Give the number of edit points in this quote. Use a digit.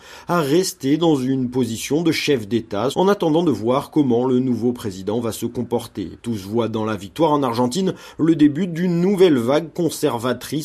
2